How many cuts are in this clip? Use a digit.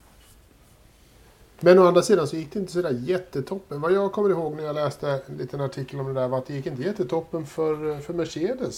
1